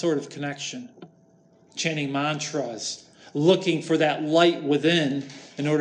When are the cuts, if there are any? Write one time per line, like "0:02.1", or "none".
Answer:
0:01.7